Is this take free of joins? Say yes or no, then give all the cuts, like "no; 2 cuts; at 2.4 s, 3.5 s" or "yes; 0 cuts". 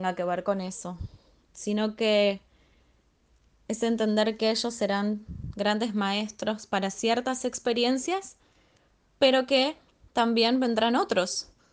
yes; 0 cuts